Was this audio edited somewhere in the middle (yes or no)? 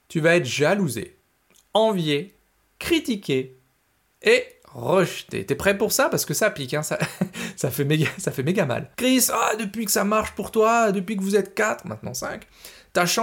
yes